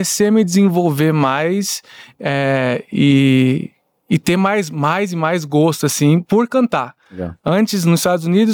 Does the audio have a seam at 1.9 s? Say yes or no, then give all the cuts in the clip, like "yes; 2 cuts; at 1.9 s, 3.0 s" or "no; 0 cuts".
no; 0 cuts